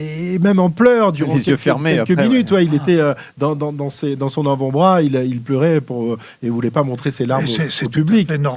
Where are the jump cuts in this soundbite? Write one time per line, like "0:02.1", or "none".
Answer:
none